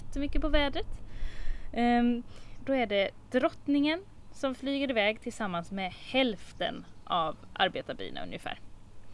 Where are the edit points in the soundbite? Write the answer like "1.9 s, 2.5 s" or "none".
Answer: 2.6 s